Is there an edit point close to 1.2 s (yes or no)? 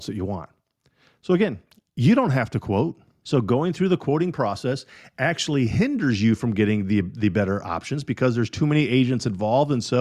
no